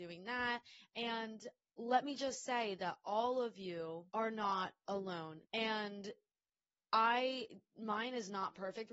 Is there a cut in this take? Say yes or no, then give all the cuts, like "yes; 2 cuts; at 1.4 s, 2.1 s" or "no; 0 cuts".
yes; 2 cuts; at 4.1 s, 5.4 s